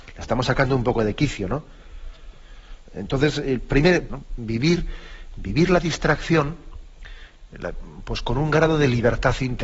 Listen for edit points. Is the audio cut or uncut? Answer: cut